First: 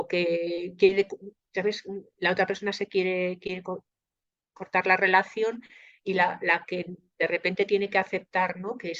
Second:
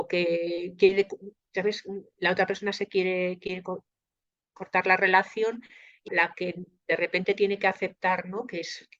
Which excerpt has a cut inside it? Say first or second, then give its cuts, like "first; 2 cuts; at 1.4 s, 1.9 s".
second; 1 cut; at 6.1 s